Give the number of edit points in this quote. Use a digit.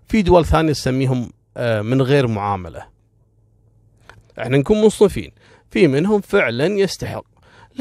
1